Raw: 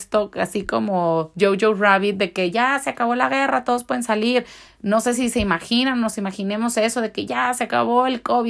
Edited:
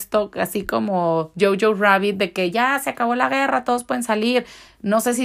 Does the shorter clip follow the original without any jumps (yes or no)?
yes